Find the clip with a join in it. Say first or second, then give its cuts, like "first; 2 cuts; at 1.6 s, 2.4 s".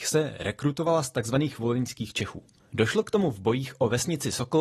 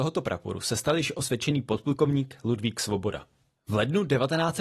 first; 1 cut; at 2.7 s